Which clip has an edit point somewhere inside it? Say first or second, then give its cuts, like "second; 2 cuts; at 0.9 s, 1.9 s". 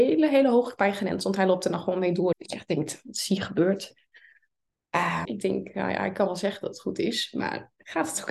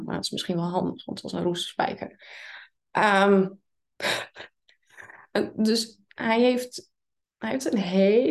first; 2 cuts; at 2.3 s, 5.2 s